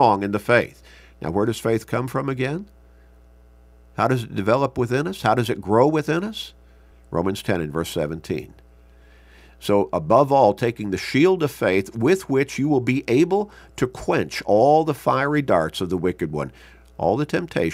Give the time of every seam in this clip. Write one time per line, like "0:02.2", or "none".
0:06.9